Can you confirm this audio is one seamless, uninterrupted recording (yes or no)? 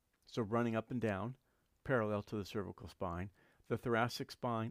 yes